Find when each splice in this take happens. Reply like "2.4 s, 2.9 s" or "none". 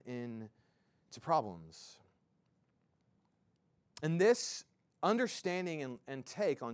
none